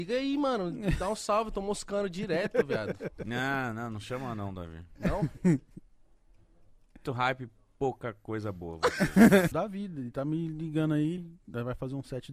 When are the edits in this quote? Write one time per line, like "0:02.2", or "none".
0:07.0
0:09.5
0:11.2